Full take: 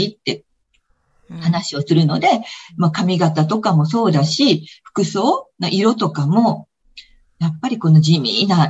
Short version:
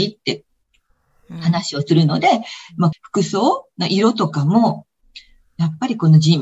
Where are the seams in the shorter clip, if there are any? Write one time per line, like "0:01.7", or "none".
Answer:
0:02.9